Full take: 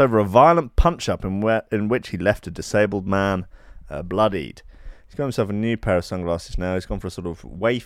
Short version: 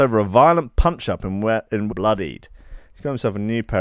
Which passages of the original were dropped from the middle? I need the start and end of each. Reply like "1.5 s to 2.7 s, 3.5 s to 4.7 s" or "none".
1.9 s to 4.0 s